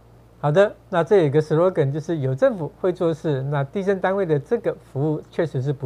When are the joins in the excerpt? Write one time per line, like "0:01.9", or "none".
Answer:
none